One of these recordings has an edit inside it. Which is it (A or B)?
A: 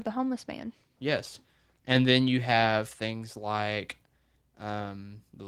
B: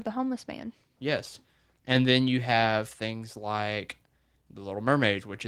B